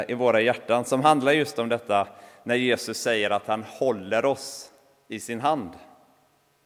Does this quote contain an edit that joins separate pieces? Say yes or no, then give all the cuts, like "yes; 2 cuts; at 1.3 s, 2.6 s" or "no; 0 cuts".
no; 0 cuts